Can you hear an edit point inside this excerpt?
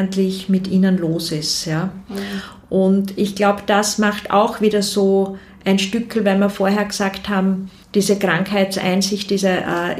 yes; 1 cut; at 7.8 s

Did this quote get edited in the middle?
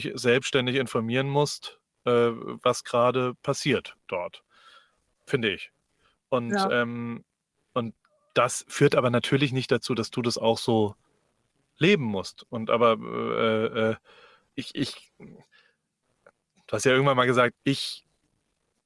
yes; 2 cuts; at 14.5 s, 17.5 s

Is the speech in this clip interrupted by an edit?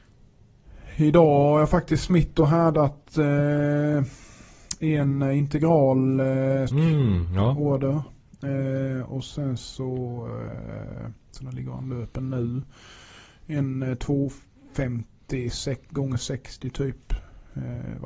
yes; 1 cut; at 6.7 s

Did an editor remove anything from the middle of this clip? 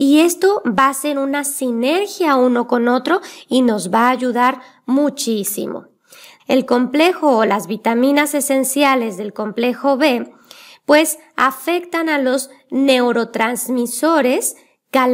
yes; 1 cut; at 6.4 s

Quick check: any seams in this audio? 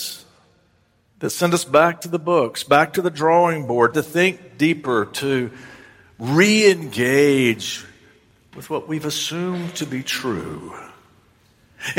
yes; 1 cut; at 3.9 s

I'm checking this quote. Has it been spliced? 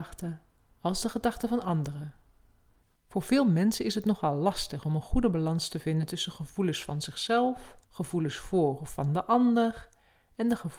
yes; 2 cuts; at 3.0 s, 7.8 s

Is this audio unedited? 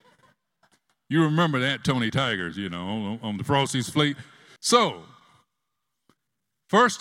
no; 1 cut; at 4.6 s

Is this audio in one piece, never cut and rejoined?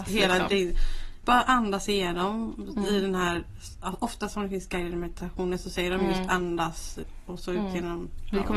no; 1 cut; at 1.2 s

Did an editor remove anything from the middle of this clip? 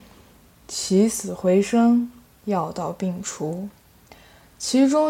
no; 0 cuts

